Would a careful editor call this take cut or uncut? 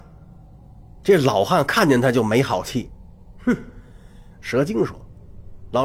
cut